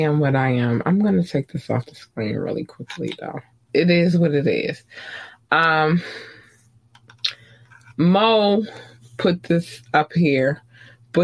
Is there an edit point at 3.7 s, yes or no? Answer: yes